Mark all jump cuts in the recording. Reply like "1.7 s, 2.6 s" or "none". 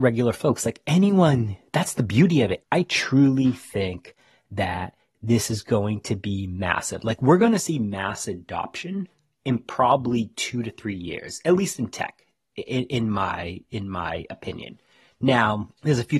2.6 s